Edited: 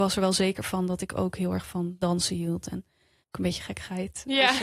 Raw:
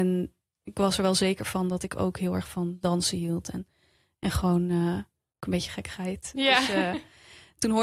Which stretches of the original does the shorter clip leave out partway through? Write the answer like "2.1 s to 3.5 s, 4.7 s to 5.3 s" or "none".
4.0 s to 5.3 s